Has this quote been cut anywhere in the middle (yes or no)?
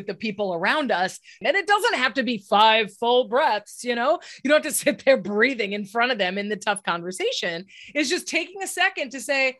yes